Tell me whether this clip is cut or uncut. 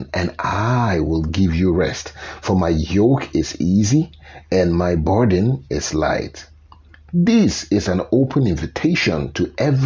uncut